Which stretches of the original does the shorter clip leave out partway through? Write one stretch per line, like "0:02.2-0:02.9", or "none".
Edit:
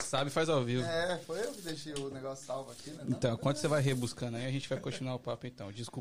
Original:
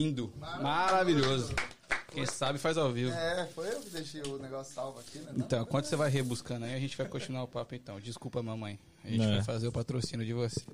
none